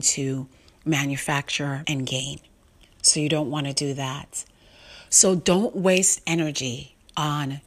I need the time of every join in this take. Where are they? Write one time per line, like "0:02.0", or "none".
0:01.8
0:05.1